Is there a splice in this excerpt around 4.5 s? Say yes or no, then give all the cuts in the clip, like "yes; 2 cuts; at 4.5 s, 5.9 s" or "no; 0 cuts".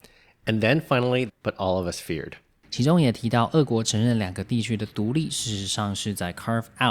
no; 2 cuts; at 1.3 s, 2.6 s